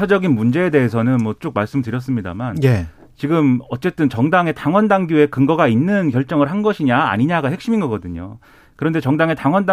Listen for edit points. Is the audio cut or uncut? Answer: uncut